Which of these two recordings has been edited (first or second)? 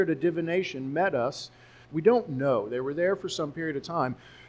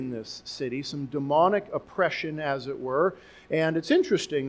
first